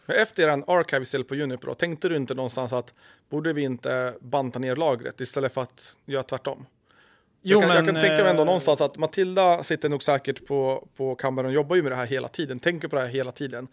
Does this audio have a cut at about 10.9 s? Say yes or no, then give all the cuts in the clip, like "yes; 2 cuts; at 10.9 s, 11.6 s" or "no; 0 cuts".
no; 0 cuts